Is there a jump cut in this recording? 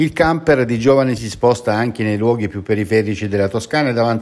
yes; 1 cut; at 1.2 s

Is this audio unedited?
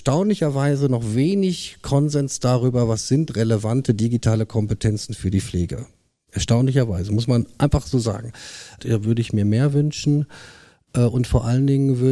no; 1 cut; at 8.8 s

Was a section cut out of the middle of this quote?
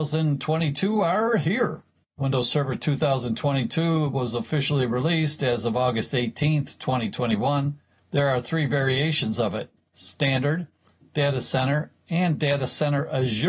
no; 0 cuts

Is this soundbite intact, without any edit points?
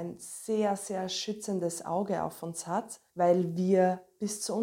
no; 1 cut; at 3.1 s

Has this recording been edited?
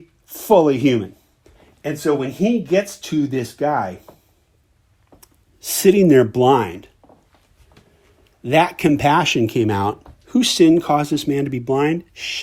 yes; 1 cut; at 1.7 s

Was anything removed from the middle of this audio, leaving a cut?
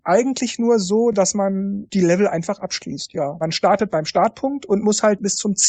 no; 0 cuts

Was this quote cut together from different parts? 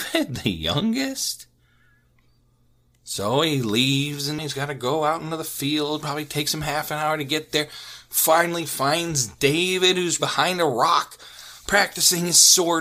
yes; 1 cut; at 10.2 s

